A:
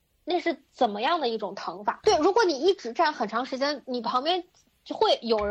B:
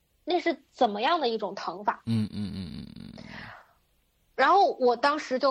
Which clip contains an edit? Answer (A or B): A